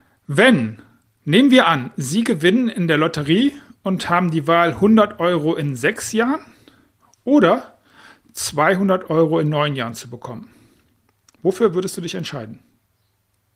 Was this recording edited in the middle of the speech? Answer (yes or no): no